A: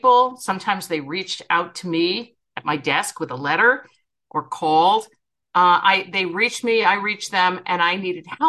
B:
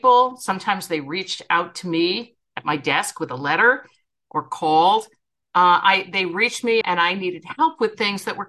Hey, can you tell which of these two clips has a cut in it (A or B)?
B